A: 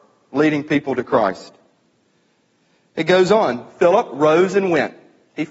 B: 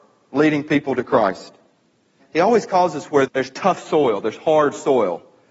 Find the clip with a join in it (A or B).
B